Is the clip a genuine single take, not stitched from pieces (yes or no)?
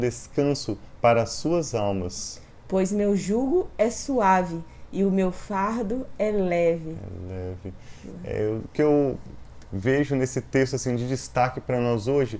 yes